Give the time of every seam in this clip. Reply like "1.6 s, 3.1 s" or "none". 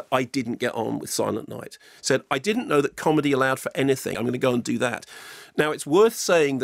2.0 s, 4.1 s